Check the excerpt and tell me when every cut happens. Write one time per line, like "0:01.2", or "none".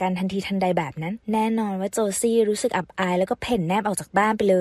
0:01.2